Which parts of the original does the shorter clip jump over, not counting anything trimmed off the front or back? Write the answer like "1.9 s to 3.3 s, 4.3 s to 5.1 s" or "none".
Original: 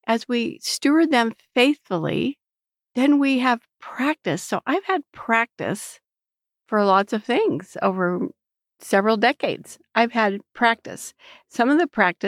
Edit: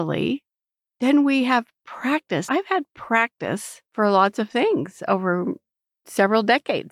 4.4 s to 4.6 s, 6.0 s to 6.6 s